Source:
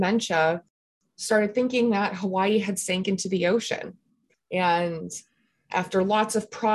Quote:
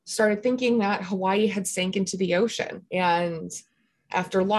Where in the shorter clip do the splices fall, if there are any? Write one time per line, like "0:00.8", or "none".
0:02.9